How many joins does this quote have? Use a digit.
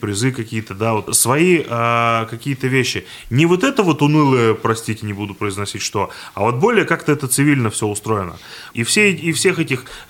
2